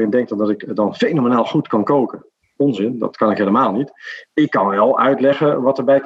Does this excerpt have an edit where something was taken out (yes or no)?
no